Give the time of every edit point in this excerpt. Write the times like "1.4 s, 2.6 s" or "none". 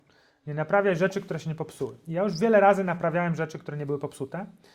none